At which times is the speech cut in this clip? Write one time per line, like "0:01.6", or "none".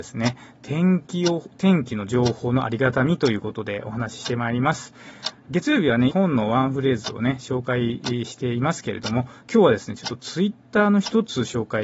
0:06.1